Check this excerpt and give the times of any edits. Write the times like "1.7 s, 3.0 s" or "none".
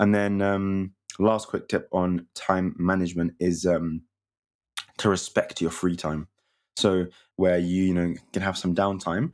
7.3 s